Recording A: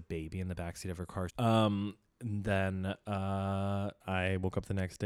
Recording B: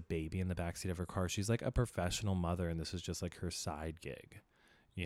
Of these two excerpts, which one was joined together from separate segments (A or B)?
A